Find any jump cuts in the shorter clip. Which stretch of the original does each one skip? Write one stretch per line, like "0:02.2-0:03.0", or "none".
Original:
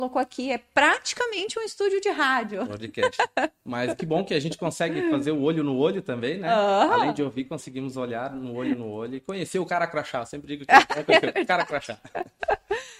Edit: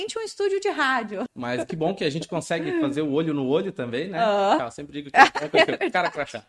0:02.7-0:03.6
0:06.9-0:10.1

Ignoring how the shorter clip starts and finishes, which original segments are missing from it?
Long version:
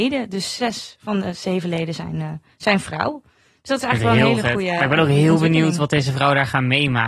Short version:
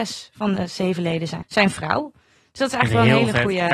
0:02.1-0:02.5

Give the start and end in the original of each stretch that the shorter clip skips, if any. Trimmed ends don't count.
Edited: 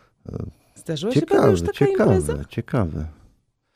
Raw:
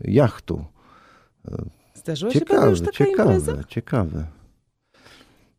none

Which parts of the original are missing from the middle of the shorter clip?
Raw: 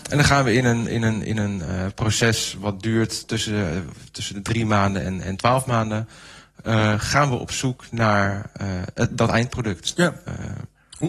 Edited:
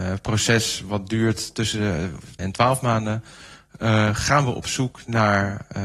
0:04.1-0:05.2

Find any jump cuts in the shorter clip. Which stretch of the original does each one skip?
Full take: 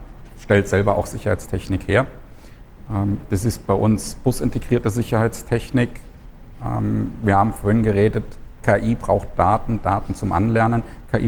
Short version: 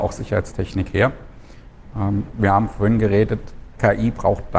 0:03.3-0:07.2

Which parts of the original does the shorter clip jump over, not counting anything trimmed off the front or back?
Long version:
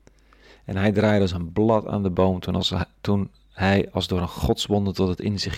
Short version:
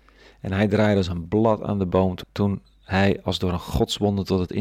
0:02.5-0:02.9

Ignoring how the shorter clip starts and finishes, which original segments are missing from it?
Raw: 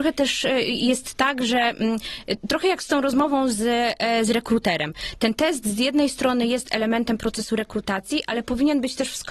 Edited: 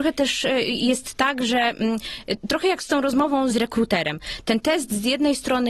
0:03.5-0:04.2

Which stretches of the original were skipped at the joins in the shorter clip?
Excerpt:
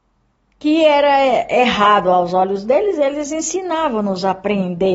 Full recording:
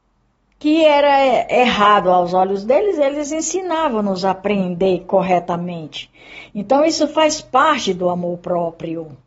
none

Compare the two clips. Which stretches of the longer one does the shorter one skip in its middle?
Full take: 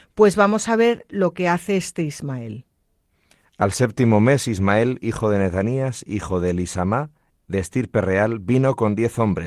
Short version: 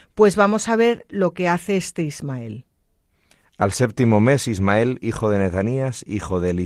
none

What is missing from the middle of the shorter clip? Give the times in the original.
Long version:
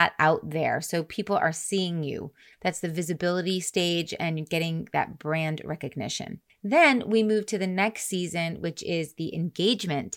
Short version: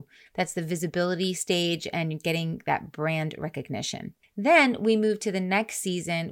none

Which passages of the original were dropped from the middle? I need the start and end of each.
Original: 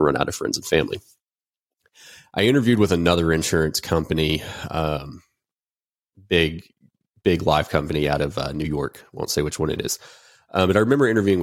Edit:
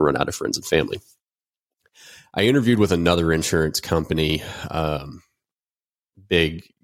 none

